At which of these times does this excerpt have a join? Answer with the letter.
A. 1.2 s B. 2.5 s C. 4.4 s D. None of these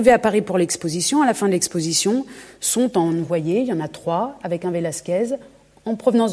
D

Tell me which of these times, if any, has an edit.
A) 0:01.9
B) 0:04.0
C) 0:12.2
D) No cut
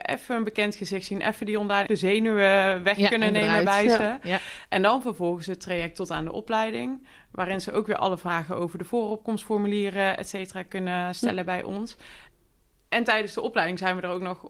A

